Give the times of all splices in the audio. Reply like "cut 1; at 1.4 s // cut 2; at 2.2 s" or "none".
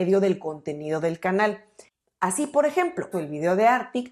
cut 1; at 3.1 s